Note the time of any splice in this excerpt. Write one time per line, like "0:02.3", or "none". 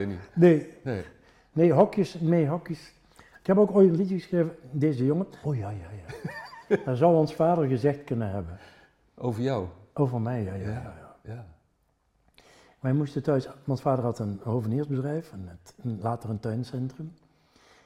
0:05.4